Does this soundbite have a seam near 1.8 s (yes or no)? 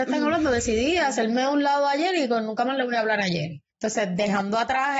no